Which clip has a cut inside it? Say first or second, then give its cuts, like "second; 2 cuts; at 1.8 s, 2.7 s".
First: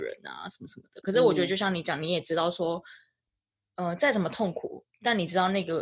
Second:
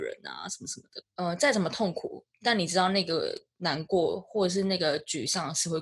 second; 1 cut; at 1.0 s